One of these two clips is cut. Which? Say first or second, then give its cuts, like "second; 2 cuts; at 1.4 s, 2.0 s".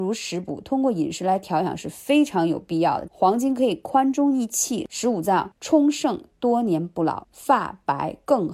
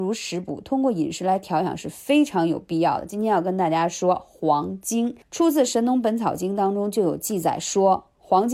first; 3 cuts; at 3.1 s, 5.5 s, 7.2 s